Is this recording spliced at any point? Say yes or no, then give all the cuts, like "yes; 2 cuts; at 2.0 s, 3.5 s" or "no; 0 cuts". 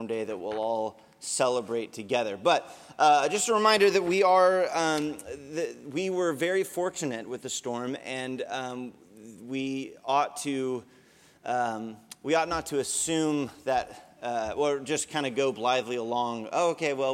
no; 0 cuts